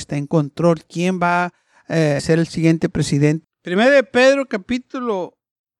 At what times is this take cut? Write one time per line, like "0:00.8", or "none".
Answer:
0:02.2
0:03.4